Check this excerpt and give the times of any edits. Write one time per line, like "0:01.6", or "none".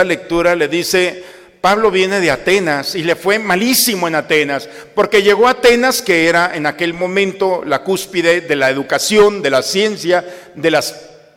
none